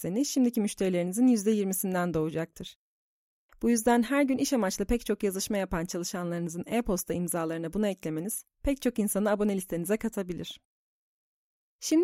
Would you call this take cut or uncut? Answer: uncut